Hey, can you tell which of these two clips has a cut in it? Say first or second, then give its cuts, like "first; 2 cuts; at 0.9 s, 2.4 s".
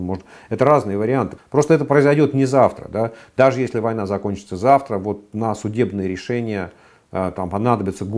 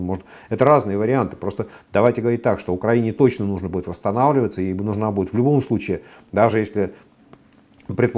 first; 1 cut; at 1.4 s